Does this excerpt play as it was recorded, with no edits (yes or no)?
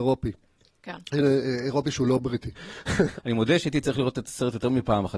no